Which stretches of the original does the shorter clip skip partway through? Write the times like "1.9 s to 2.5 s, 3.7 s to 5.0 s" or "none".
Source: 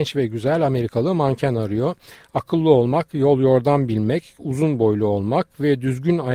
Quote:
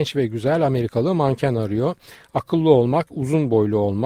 3.1 s to 4.4 s